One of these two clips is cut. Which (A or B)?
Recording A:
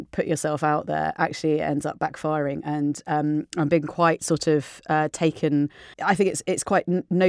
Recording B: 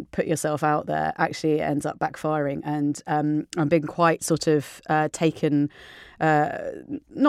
A